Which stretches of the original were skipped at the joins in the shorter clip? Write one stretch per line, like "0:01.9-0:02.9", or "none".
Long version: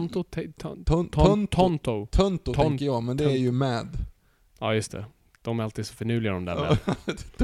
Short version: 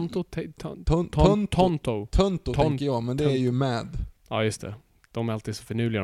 0:04.2-0:04.5